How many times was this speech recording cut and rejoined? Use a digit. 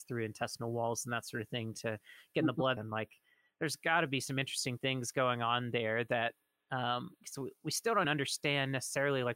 2